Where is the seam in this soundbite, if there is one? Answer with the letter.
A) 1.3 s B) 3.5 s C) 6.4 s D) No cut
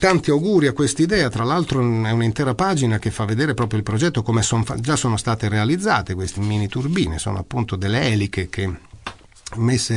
C